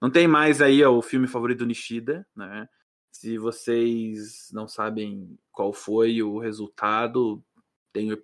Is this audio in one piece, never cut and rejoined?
yes; 0 cuts

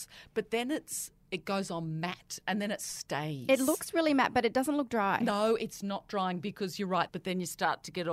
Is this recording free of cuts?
no; 1 cut; at 7.1 s

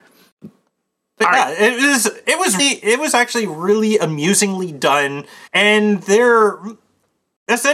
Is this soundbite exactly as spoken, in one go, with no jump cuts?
no; 2 cuts; at 2.6 s, 5.5 s

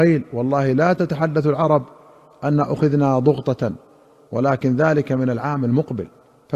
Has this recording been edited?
no; 0 cuts

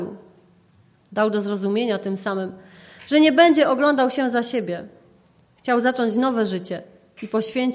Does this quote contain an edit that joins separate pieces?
no; 0 cuts

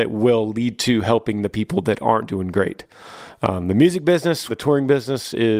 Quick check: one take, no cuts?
no; 1 cut; at 4.5 s

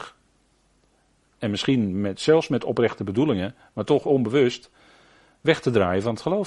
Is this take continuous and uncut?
yes; 0 cuts

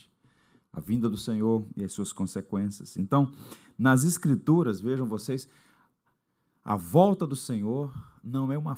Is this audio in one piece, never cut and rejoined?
yes; 0 cuts

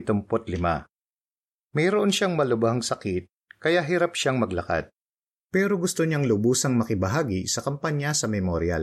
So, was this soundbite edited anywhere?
no; 0 cuts

